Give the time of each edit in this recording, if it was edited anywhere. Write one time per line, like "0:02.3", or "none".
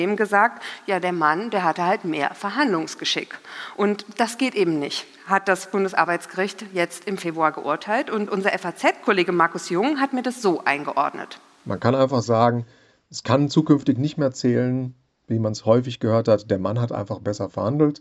none